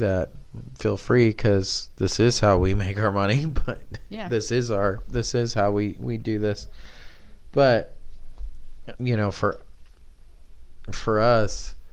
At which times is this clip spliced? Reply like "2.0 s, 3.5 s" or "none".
8.9 s

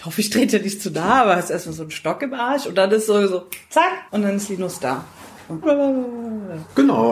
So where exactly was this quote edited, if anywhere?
4.1 s, 5.6 s

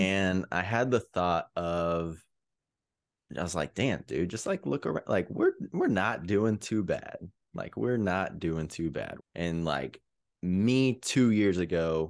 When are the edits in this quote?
9.2 s

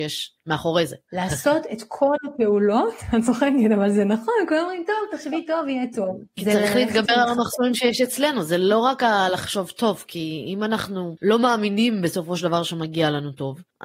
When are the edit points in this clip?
1.1 s

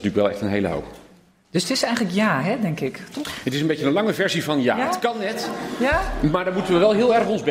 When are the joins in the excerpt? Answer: none

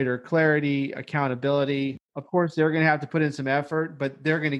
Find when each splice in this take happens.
2.1 s

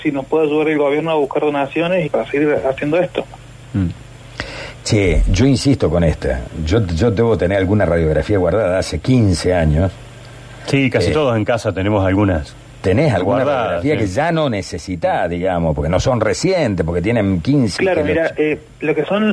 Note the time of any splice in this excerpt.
2.1 s, 17.8 s

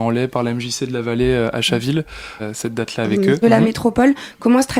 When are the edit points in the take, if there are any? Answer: 2.4 s, 3.4 s

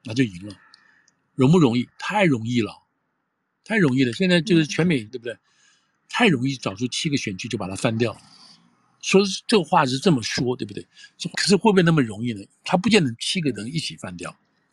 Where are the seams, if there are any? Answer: 5.1 s, 11.3 s, 12.5 s

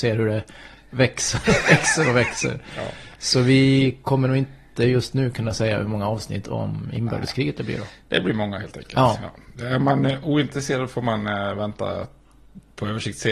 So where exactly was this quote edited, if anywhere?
none

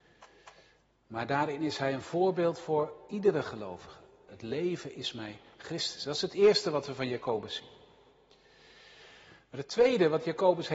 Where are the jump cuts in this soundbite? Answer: 4.3 s

